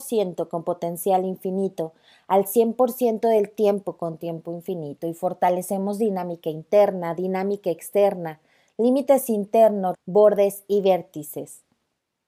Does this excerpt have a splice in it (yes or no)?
yes